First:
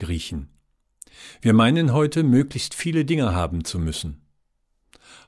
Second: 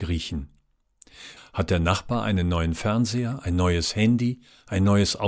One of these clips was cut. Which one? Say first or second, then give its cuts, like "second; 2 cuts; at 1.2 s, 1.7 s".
second; 1 cut; at 1.4 s